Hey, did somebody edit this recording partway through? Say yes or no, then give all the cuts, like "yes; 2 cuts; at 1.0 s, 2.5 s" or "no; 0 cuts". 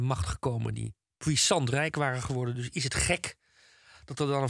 no; 0 cuts